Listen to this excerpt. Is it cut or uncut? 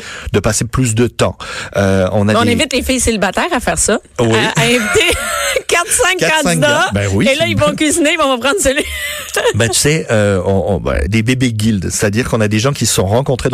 cut